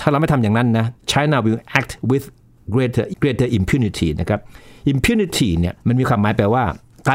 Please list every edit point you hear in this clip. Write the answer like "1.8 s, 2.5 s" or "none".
3.1 s